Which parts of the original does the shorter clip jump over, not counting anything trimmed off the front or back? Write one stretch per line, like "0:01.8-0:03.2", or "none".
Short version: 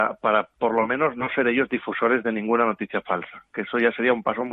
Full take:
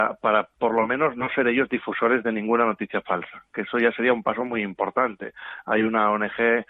none